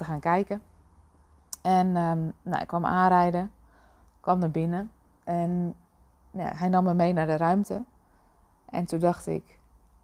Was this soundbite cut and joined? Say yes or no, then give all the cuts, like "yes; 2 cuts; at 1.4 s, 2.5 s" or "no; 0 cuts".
no; 0 cuts